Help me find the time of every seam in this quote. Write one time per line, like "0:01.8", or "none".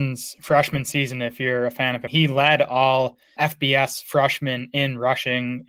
0:02.1